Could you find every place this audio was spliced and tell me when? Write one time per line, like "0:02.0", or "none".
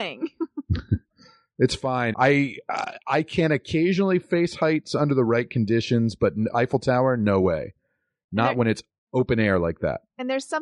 0:02.1

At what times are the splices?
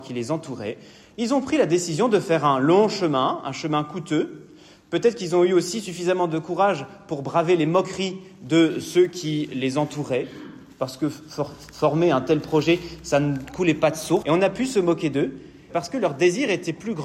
0:14.2
0:15.7

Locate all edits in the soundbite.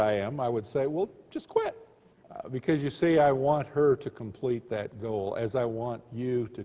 0:02.2

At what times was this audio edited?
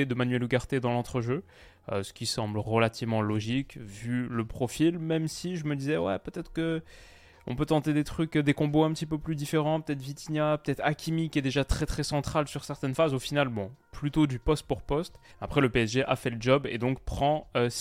0:15.3

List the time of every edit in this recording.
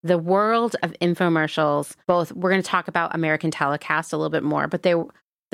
0:02.0

